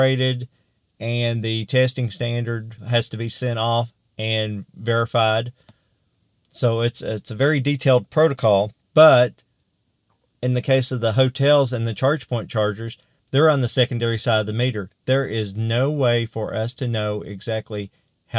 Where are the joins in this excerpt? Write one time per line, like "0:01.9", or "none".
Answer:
0:08.8